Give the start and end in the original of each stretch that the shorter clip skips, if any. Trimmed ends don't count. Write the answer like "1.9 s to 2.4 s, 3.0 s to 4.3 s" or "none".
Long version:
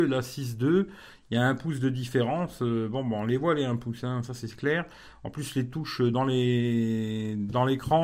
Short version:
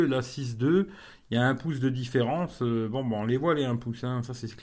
none

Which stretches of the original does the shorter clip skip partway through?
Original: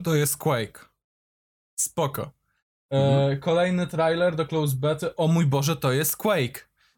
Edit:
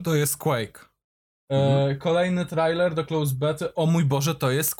1.3 s to 2.7 s

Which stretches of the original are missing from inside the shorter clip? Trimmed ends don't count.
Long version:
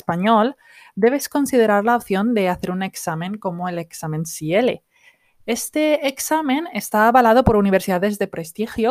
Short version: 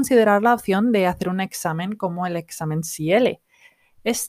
none

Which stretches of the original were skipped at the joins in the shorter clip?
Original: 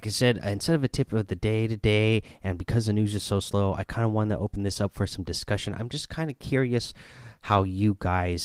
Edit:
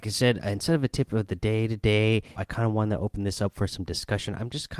2.4 s to 3.8 s

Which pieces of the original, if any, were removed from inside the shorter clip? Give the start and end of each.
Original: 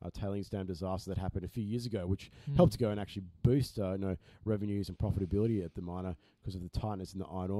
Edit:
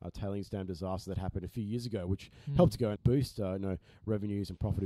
3.0 s to 3.3 s

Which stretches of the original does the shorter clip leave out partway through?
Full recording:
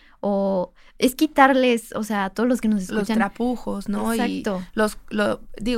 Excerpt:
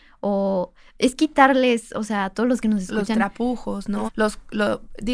4.1 s to 4.6 s

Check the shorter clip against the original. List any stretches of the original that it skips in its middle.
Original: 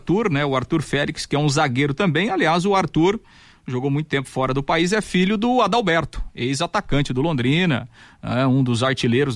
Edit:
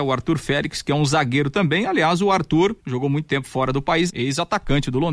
3.2 s to 3.6 s, 4.9 s to 6.3 s

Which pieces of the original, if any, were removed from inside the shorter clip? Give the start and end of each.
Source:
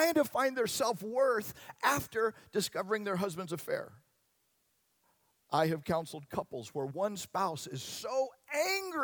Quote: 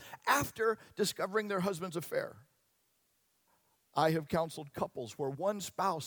none

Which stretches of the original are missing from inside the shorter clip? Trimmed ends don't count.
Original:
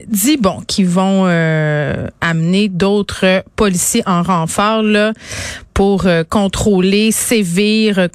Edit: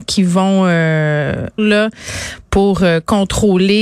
2.2 s to 4.8 s

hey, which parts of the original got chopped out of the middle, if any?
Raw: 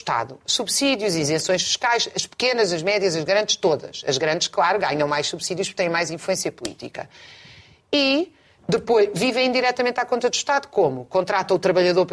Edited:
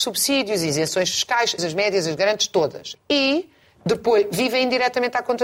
2.1 s to 2.7 s, 4.0 s to 7.8 s

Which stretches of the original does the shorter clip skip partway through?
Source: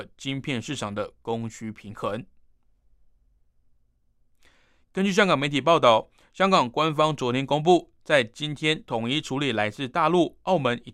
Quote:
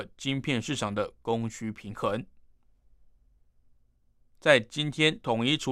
4.4 s to 8.0 s

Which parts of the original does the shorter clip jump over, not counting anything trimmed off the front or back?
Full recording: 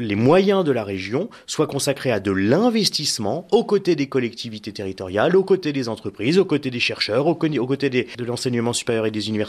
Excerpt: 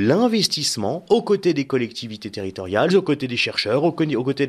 5.3 s to 6.3 s

